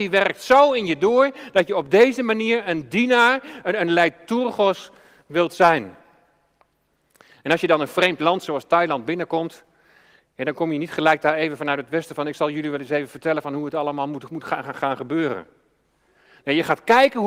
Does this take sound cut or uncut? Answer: uncut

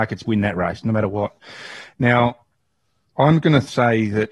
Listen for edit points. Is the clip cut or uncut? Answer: uncut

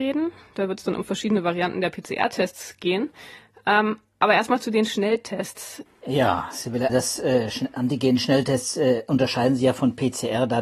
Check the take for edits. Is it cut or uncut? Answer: cut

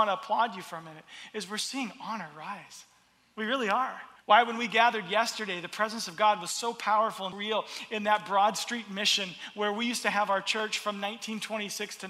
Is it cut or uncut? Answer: cut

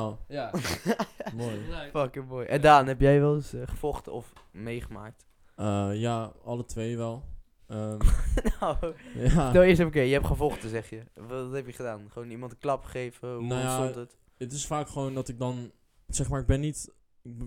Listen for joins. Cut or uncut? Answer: uncut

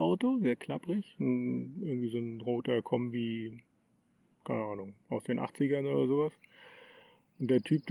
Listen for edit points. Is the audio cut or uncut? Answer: uncut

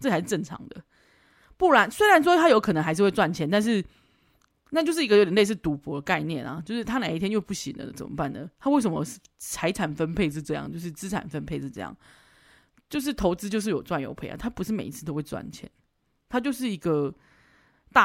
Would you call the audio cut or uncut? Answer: uncut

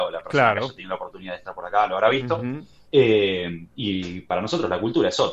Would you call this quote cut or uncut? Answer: uncut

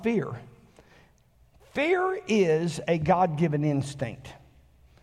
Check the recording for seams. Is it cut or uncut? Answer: uncut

